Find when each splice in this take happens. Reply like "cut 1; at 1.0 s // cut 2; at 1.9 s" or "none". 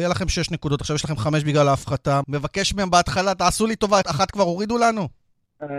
cut 1; at 2.2 s // cut 2; at 4.0 s

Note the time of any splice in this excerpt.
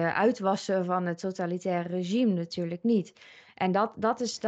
none

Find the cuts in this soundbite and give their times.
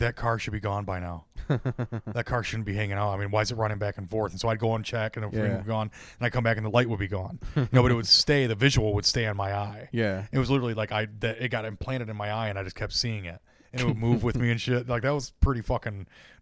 none

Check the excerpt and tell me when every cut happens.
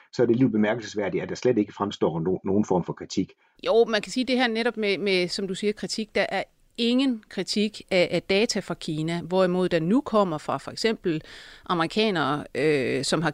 cut 1; at 3.5 s

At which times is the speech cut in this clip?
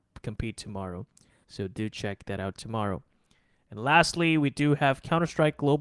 cut 1; at 1.4 s

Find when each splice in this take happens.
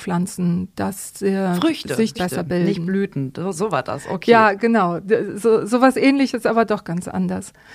cut 1; at 2.2 s

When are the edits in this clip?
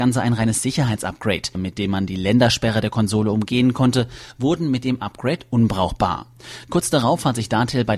cut 1; at 1.5 s

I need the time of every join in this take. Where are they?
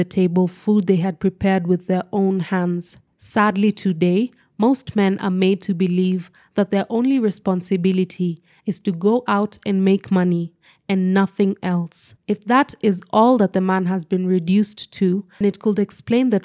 cut 1; at 12.2 s // cut 2; at 15.4 s

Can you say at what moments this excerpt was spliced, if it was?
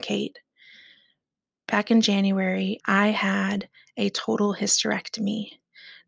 cut 1; at 2.8 s

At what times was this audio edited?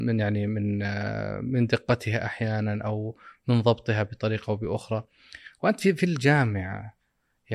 none

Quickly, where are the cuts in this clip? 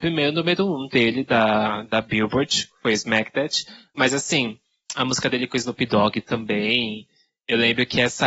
none

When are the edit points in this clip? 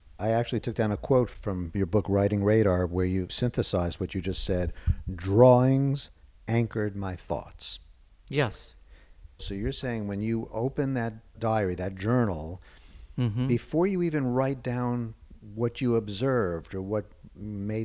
none

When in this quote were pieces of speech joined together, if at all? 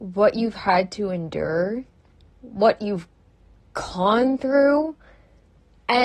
cut 1; at 2.3 s

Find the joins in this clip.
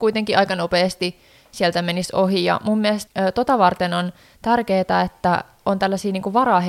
cut 1; at 3.1 s

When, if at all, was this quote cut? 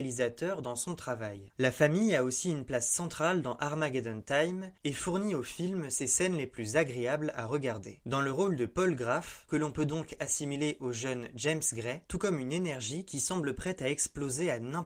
cut 1; at 1.5 s // cut 2; at 12.1 s

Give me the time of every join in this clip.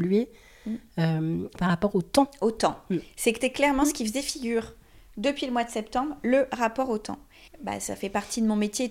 cut 1; at 1.6 s // cut 2; at 7.5 s

